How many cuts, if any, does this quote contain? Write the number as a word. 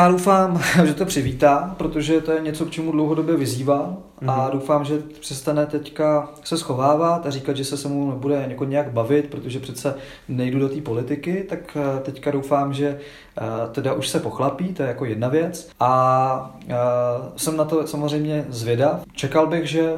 two